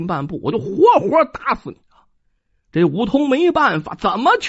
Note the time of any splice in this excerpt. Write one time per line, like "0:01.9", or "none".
0:01.8